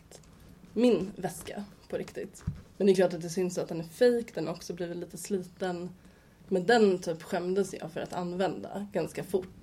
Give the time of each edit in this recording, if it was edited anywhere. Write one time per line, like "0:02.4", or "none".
none

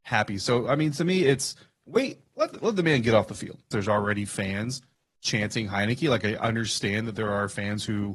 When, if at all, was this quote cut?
0:03.7

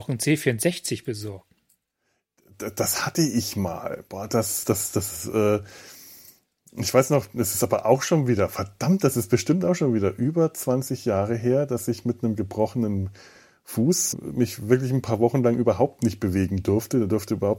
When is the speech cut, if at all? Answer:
0:04.6
0:14.1

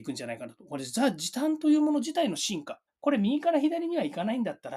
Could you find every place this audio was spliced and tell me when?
0:02.9

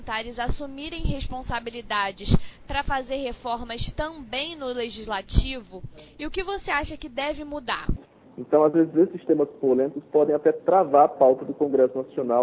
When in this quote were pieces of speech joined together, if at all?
0:08.2

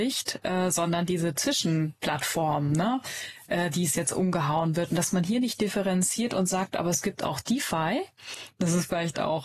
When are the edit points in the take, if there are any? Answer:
none

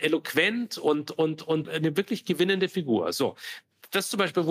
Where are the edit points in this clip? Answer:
0:01.6

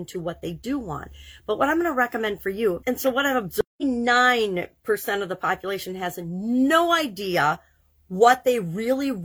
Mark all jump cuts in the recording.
0:02.8

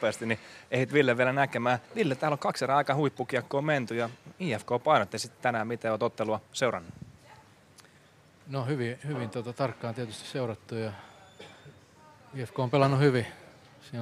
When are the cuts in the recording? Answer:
0:01.9

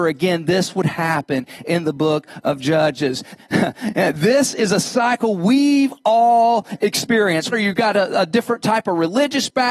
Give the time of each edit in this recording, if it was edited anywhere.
0:03.4
0:07.5

